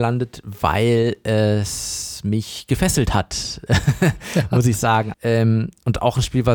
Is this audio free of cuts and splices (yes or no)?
no